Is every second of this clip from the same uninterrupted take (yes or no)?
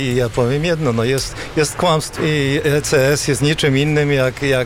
no